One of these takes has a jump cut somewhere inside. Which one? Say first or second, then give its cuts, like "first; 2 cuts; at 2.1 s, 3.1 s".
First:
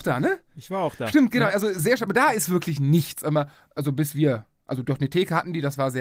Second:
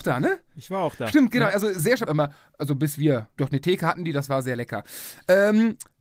second; 2 cuts; at 2.1 s, 3.4 s